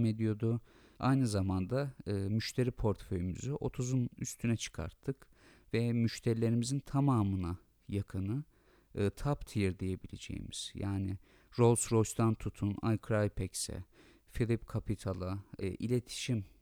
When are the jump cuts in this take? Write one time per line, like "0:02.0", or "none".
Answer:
0:00.9
0:15.6